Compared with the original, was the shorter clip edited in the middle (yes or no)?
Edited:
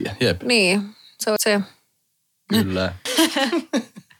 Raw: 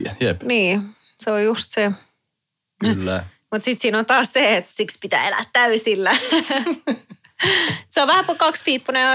yes